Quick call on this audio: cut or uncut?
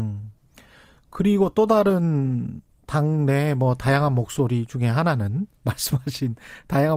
uncut